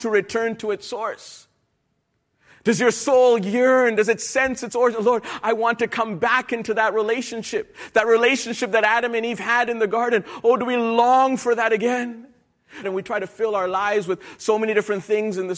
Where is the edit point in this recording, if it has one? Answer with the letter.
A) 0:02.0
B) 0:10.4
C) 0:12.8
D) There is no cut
C